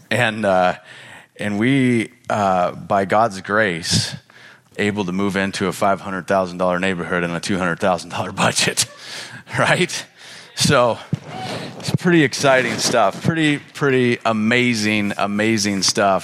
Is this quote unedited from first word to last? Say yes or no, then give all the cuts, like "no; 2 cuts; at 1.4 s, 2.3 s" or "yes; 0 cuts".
no; 1 cut; at 4.7 s